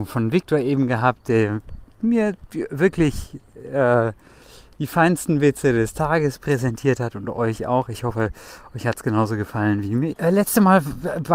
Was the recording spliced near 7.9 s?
no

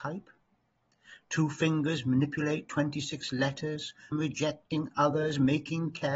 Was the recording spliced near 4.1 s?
yes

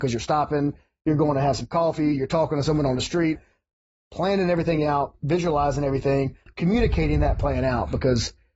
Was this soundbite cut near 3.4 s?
yes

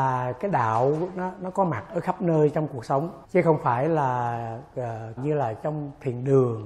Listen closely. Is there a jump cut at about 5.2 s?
yes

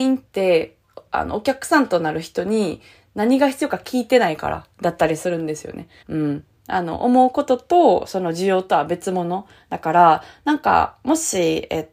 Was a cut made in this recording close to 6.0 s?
yes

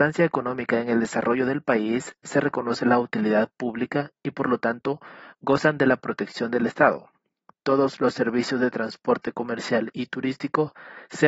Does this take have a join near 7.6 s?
no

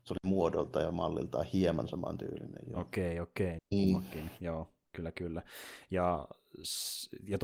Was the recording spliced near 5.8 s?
no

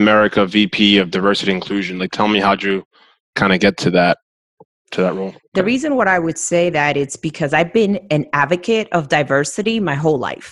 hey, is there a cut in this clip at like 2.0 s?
no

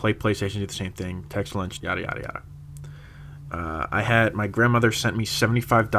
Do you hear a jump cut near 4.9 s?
no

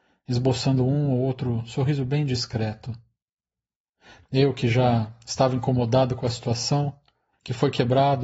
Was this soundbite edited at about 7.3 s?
yes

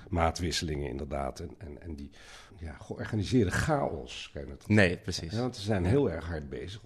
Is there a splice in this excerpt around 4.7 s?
yes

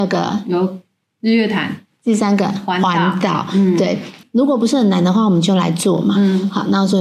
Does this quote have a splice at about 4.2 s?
yes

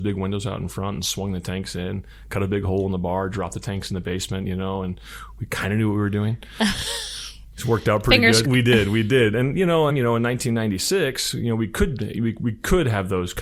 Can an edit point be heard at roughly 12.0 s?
no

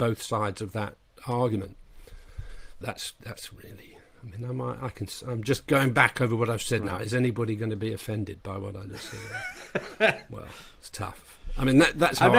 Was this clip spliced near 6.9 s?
no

